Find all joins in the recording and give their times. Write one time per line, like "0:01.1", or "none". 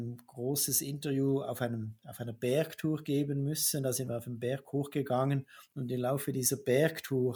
none